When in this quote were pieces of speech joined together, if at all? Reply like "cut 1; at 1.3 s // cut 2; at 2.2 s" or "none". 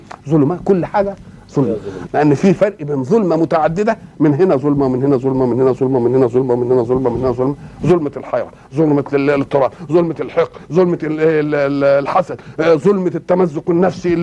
cut 1; at 2.1 s